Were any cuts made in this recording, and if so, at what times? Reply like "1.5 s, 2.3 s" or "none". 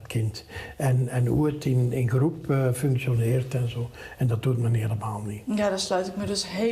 none